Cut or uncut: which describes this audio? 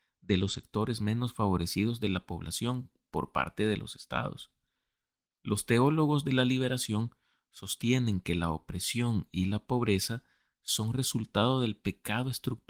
uncut